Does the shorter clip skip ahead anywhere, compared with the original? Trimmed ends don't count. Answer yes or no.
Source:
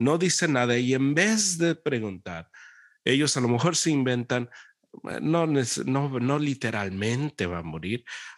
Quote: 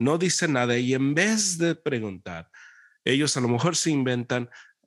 no